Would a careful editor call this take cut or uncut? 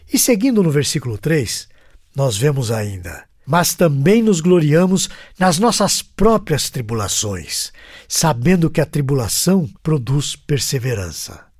cut